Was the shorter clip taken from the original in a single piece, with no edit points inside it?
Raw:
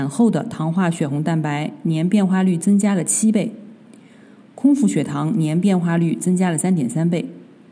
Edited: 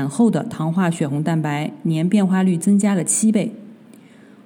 yes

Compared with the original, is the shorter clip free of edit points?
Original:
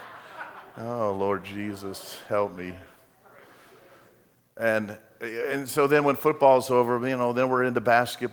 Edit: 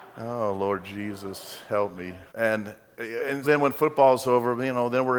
no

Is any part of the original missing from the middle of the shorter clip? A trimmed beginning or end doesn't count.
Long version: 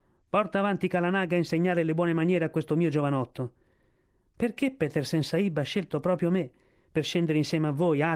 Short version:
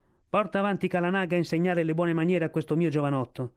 no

